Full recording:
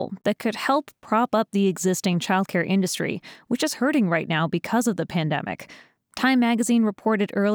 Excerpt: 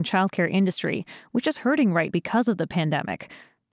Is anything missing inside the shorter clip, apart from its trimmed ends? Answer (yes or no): yes